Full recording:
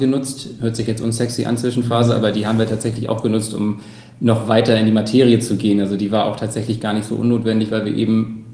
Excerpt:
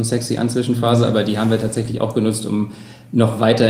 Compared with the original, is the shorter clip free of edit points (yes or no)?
yes